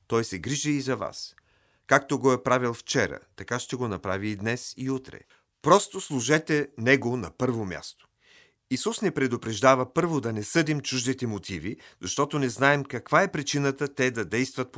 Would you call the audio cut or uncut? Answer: uncut